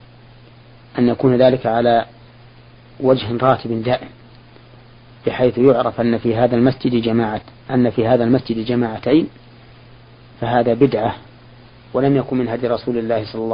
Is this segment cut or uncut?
uncut